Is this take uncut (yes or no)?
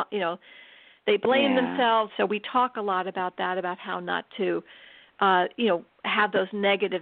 no